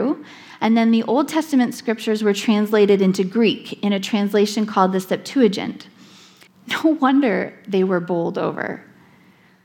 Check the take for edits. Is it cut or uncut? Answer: cut